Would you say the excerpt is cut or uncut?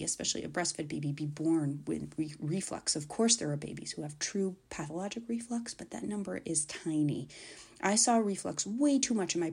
uncut